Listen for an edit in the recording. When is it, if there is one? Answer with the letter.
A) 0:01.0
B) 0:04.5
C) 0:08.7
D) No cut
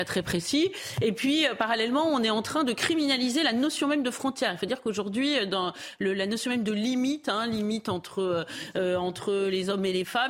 D